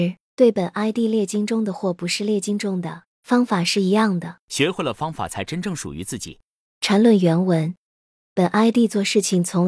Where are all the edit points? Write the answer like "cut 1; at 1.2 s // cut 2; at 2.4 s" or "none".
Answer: cut 1; at 4.4 s